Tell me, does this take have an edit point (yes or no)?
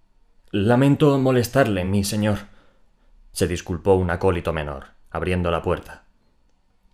no